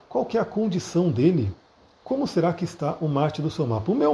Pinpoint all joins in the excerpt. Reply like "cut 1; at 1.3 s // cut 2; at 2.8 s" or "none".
none